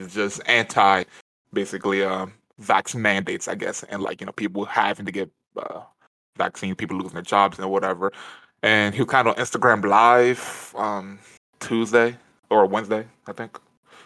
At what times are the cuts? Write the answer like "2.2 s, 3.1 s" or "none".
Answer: none